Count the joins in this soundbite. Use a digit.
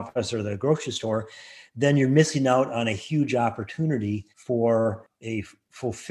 1